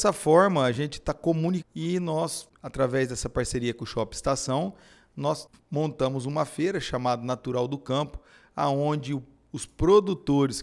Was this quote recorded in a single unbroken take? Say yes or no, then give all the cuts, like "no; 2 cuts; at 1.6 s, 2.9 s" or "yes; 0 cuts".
no; 1 cut; at 1.6 s